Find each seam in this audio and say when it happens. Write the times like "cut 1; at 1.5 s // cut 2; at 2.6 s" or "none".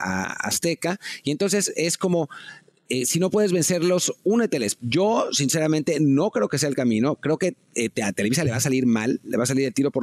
cut 1; at 4.8 s